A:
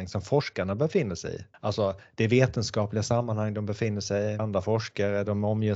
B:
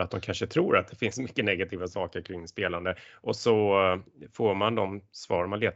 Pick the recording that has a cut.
A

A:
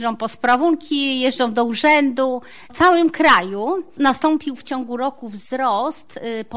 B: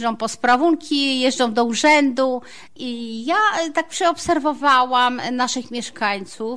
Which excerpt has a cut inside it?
B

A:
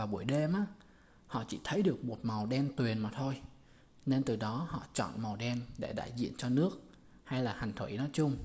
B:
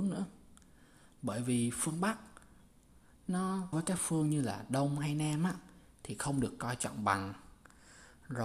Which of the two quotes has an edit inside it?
B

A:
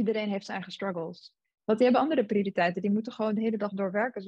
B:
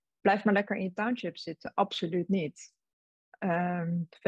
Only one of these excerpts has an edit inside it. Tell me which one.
A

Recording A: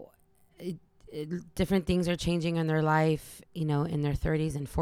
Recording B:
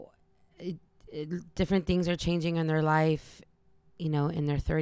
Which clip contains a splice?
A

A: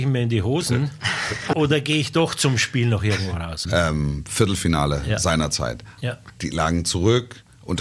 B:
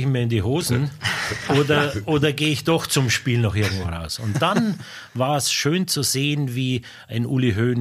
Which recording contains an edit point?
A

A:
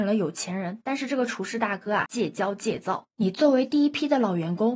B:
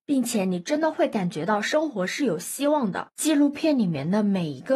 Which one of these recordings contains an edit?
A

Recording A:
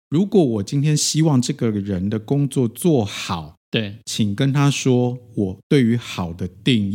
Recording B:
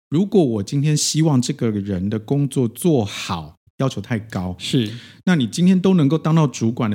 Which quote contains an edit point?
B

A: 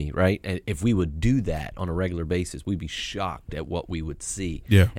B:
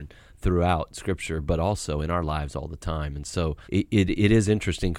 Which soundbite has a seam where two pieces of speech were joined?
B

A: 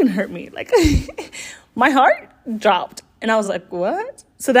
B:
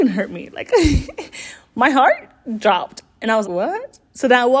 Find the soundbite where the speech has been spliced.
B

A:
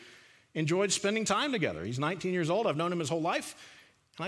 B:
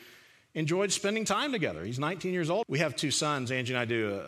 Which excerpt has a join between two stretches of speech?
B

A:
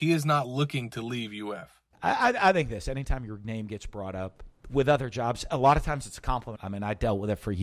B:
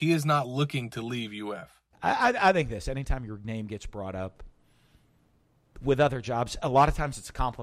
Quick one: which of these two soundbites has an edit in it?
A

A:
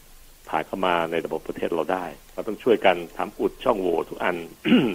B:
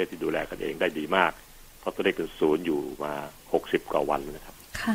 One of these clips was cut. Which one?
A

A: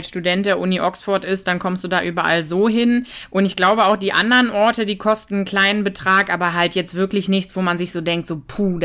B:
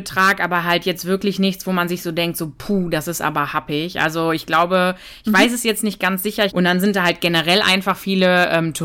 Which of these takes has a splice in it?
B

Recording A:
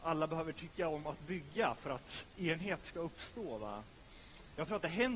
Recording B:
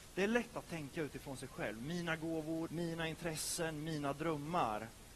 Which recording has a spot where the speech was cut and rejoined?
B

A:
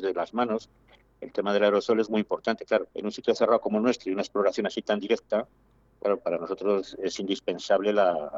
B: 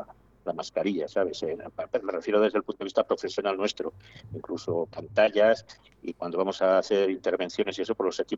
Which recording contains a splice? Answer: A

